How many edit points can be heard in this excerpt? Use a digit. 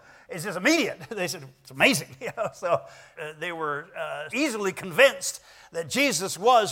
2